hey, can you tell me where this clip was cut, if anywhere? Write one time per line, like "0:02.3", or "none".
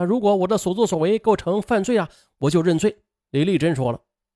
0:03.2